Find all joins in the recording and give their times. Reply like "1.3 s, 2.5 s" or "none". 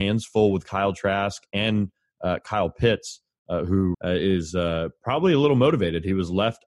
3.9 s